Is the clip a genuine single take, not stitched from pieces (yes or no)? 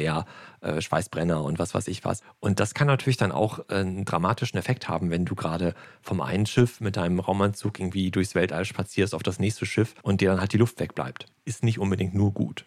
yes